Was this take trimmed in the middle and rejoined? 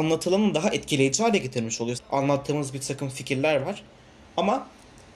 yes; 1 cut; at 1.9 s

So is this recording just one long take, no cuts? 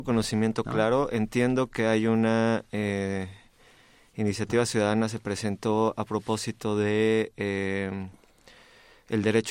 yes; 0 cuts

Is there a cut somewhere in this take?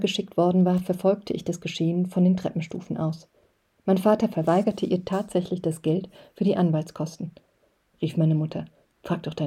yes; 1 cut; at 7.9 s

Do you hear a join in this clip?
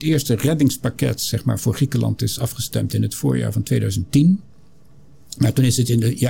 no; 0 cuts

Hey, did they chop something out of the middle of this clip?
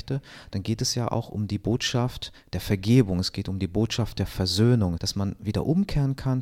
yes; 1 cut; at 5.0 s

